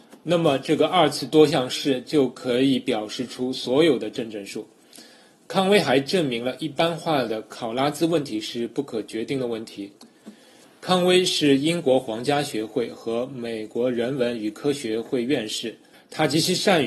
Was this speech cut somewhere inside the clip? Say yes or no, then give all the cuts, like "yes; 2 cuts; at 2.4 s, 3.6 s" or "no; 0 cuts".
yes; 1 cut; at 15.9 s